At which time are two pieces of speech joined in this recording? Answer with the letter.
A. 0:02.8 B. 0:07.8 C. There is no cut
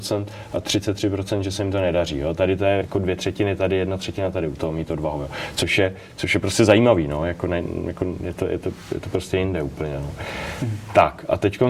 A